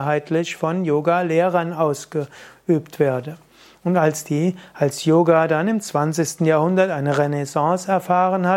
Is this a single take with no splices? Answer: yes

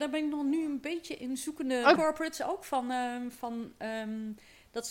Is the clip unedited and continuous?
no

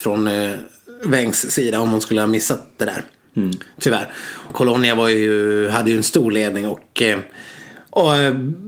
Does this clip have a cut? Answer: yes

